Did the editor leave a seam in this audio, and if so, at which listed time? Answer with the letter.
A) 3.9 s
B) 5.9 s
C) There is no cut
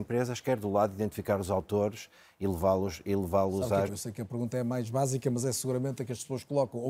A